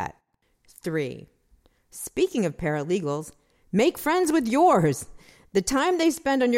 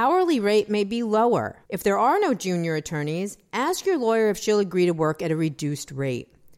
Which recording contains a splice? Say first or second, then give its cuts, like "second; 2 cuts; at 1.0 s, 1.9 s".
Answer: second; 1 cut; at 1.7 s